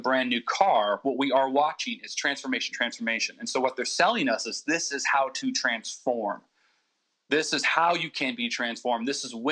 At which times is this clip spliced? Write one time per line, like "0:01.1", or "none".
0:02.7